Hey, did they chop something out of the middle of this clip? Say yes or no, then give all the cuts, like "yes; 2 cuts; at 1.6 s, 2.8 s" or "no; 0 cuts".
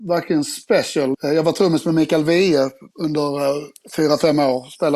yes; 2 cuts; at 1.1 s, 2.9 s